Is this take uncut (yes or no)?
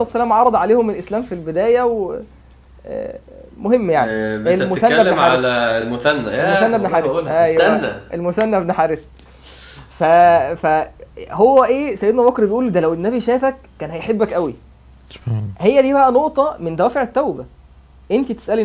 yes